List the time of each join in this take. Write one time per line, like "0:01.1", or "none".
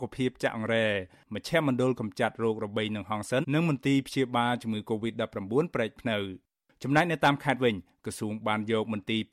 0:03.4